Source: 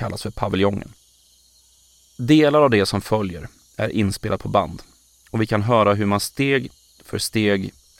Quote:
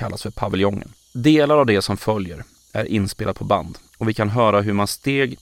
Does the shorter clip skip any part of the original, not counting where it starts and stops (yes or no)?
yes